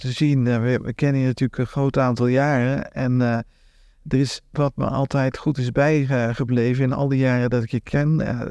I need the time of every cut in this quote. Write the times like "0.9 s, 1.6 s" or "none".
4.5 s